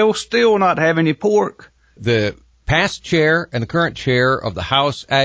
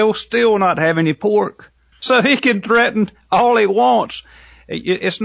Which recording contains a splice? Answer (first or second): first